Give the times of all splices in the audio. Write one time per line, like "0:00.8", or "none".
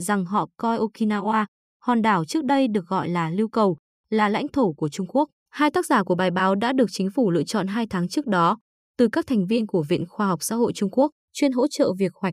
0:05.4
0:11.2